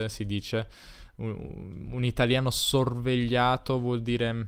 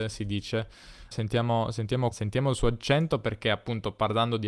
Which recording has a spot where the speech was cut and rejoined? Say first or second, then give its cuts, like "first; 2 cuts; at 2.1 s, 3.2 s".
second; 2 cuts; at 1.1 s, 2.1 s